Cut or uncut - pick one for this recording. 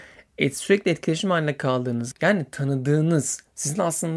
cut